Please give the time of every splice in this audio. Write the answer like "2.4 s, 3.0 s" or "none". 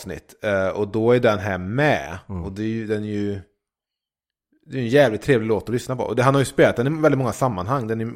none